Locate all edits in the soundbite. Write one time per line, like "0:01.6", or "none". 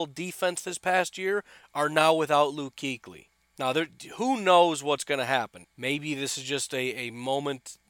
0:05.6